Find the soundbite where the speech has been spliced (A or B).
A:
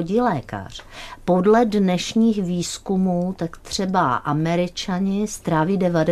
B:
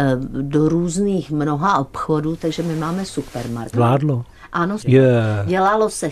B